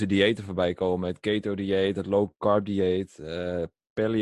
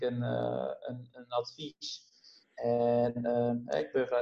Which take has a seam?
second; 1 cut; at 1.1 s

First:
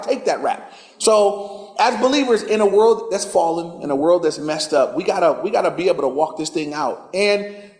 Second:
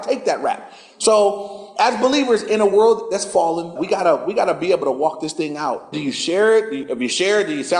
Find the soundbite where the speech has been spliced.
second; 2 cuts; at 3.8 s, 5.9 s

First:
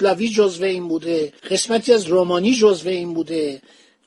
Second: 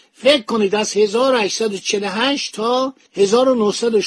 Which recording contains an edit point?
first; 1 cut; at 1.4 s

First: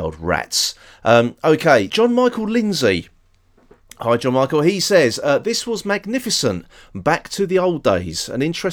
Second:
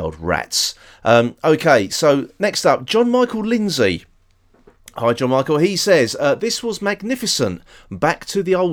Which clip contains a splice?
first; 1 cut; at 1.9 s

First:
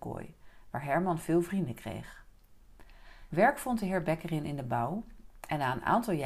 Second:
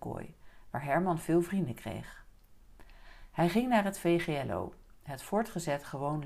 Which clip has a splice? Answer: first; 1 cut; at 3.3 s

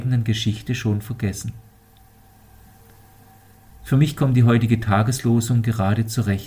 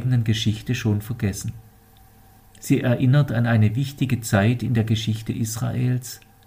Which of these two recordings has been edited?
second; 1 cut; at 2.4 s

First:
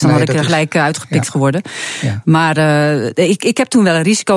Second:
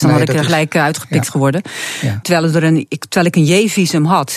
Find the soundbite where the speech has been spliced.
second; 1 cut; at 2.2 s

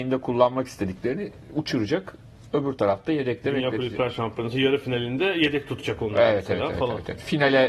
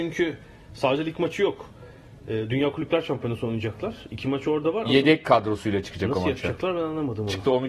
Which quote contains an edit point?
second; 1 cut; at 4.8 s

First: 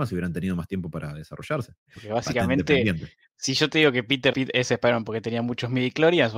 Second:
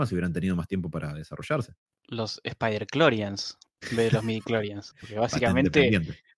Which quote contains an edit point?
first; 2 cuts; at 1.9 s, 4.3 s

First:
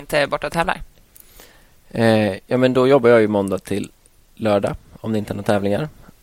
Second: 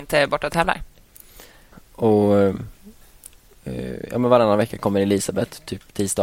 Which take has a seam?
second; 1 cut; at 1.7 s

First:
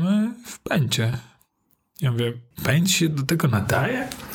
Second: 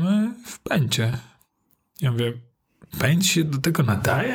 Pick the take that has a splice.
first; 1 cut; at 2.5 s

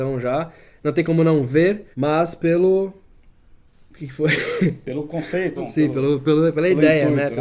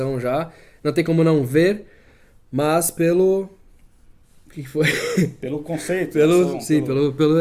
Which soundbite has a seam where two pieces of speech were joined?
first; 2 cuts; at 1.9 s, 5.6 s

